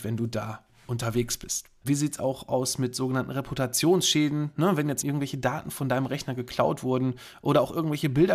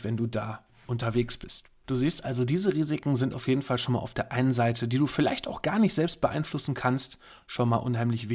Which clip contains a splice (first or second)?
first